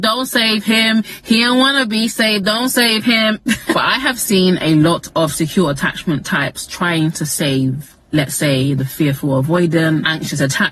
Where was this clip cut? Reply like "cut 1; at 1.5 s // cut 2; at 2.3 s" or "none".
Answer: none

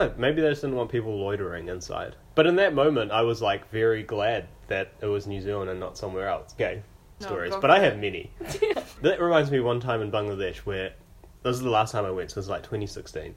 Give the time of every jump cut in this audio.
cut 1; at 7.2 s // cut 2; at 8.7 s

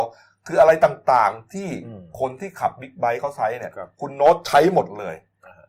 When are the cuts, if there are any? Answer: none

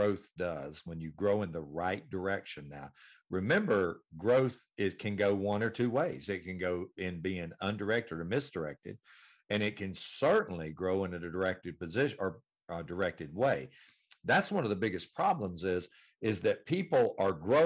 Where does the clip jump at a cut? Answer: none

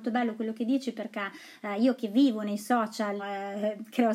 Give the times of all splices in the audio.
cut 1; at 3.2 s

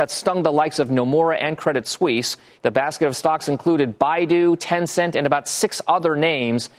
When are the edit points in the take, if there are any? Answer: cut 1; at 2.5 s

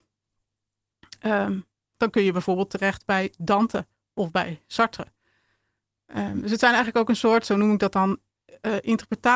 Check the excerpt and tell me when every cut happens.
none

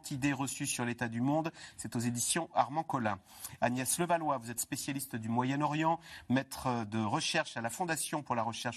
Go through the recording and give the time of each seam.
none

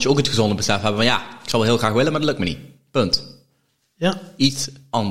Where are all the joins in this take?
none

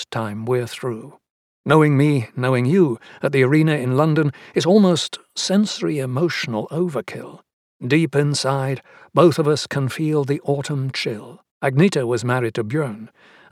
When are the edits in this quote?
cut 1; at 1.5 s // cut 2; at 7.7 s // cut 3; at 11.5 s

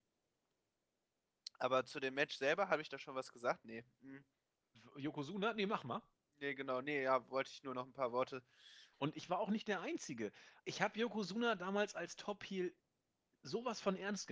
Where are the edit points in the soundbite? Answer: cut 1; at 8.9 s // cut 2; at 10.6 s

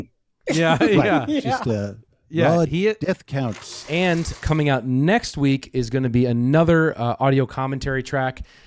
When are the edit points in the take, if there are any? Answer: cut 1; at 4.4 s

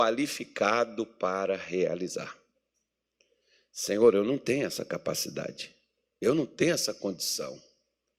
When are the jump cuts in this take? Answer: none

